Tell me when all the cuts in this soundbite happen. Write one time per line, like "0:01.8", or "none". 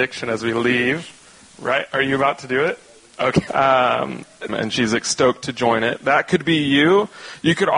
0:03.5
0:04.5